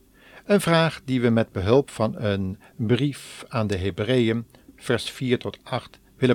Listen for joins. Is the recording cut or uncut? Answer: cut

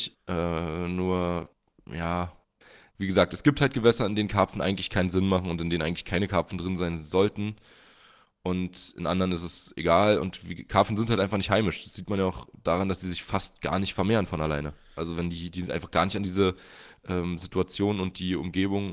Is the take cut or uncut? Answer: uncut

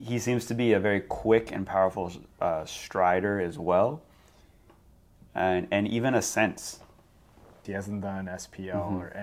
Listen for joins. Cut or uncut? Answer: cut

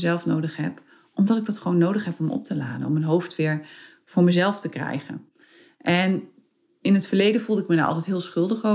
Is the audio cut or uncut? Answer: uncut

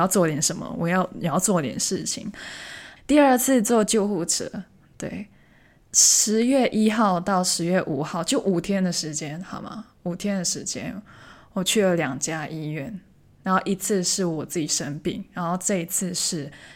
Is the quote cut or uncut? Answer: cut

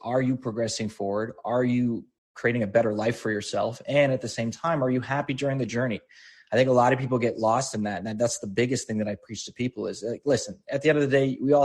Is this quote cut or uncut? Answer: uncut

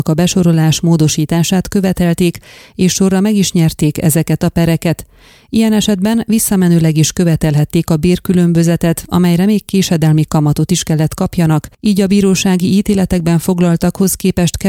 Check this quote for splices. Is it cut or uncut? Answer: uncut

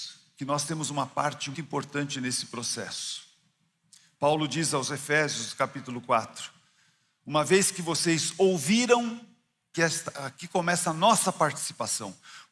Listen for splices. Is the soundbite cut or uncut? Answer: cut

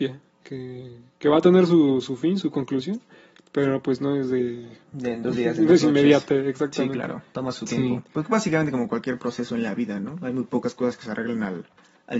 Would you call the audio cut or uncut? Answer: uncut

